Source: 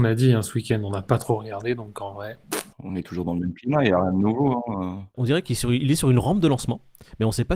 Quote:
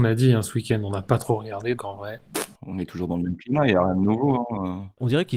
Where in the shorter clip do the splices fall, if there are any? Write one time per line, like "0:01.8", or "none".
0:01.8